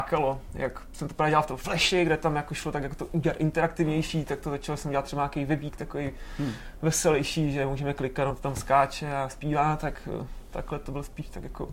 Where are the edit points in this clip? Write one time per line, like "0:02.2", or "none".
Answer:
none